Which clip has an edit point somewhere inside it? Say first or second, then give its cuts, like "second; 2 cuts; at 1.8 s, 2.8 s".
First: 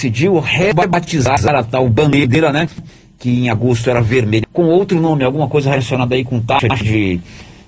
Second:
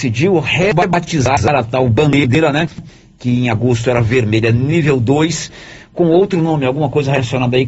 first; 1 cut; at 4.4 s